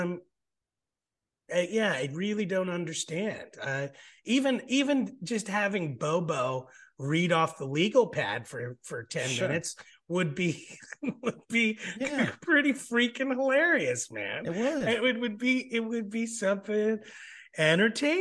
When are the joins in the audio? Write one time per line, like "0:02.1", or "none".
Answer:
none